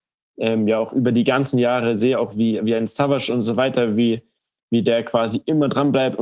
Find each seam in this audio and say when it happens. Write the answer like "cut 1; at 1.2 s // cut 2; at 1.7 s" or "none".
none